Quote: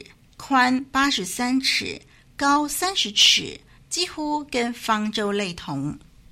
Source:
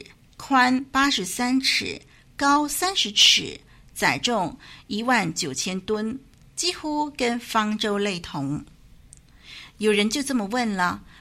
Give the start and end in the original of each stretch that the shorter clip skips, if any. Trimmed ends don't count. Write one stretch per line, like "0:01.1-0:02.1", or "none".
0:03.8-0:06.4